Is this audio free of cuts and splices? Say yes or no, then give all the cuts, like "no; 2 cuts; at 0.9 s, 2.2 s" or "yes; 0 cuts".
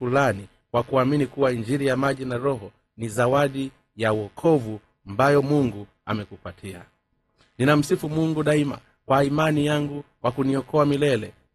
yes; 0 cuts